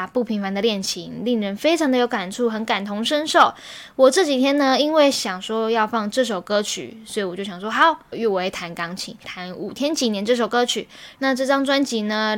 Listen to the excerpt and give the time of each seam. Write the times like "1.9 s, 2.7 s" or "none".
8.1 s, 9.2 s, 11.2 s